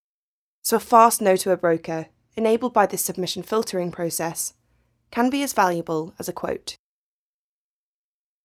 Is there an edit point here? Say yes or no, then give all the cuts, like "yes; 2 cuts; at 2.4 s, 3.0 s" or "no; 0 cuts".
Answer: no; 0 cuts